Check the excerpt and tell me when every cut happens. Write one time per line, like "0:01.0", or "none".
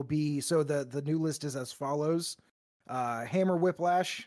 none

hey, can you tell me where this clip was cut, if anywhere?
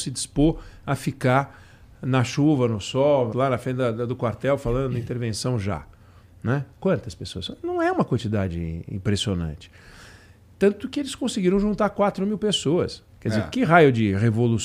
0:03.3

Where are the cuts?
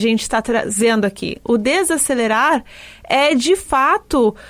none

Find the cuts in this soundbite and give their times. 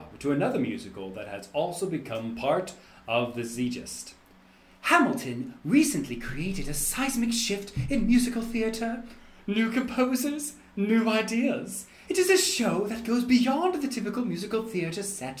0:12.1

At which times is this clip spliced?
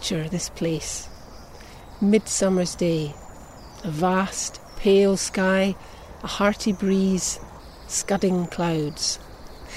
none

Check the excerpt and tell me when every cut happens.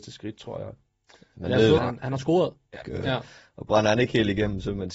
0:01.8
0:02.8

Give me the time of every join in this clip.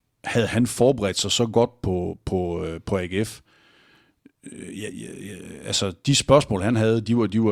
none

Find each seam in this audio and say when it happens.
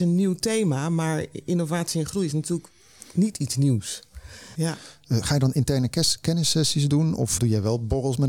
0:04.5
0:07.4

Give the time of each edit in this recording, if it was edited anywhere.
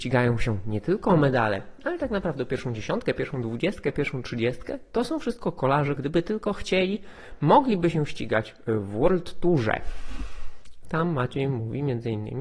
0:06.0
0:10.8

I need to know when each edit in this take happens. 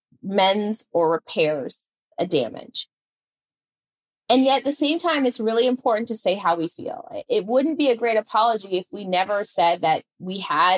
none

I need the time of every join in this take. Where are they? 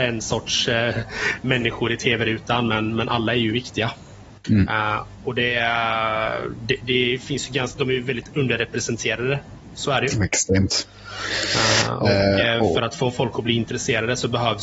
0:04.4

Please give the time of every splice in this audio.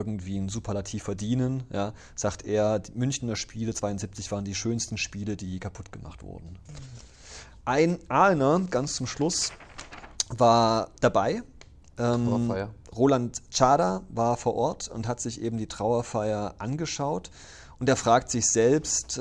none

